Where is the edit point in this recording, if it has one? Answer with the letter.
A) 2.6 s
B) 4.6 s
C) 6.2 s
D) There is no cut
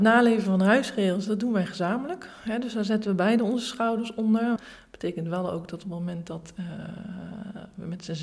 B